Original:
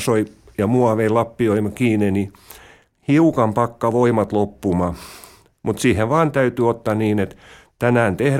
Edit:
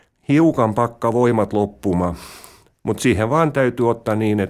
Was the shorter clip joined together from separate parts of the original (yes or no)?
no